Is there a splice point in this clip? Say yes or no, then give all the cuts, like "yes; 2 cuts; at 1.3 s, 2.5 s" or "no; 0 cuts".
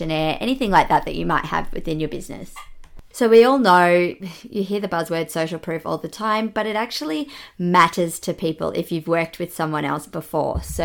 yes; 1 cut; at 3.1 s